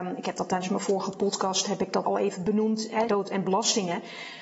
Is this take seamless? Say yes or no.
no